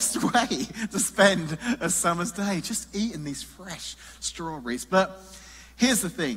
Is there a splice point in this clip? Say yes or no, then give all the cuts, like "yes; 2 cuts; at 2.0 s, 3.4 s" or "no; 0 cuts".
no; 0 cuts